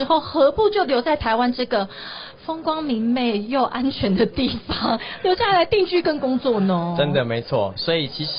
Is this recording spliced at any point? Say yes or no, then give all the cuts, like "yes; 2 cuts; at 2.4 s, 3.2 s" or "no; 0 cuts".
no; 0 cuts